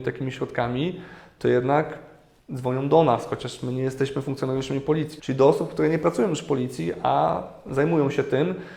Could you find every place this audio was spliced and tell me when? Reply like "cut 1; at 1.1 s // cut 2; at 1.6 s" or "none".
cut 1; at 5.2 s